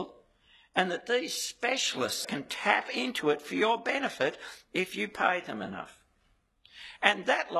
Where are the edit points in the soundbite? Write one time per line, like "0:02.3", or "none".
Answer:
0:02.2